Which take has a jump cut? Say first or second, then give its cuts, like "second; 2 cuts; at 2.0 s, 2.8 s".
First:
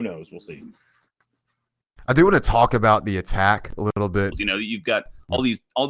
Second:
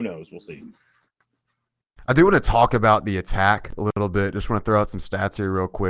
first; 1 cut; at 4.3 s